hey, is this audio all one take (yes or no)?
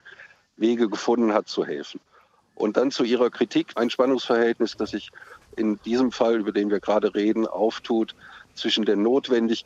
no